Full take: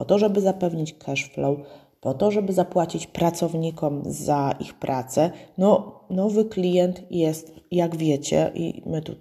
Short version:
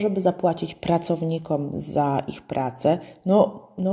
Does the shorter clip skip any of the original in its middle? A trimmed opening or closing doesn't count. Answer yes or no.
no